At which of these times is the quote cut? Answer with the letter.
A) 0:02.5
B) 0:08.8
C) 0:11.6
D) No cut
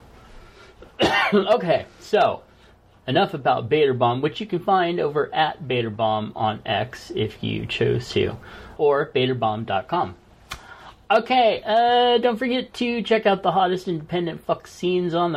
B